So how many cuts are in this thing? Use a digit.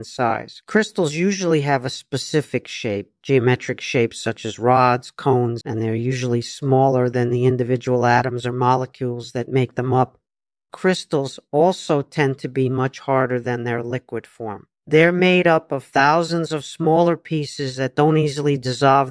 1